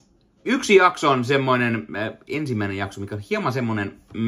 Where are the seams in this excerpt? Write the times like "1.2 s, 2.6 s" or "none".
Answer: none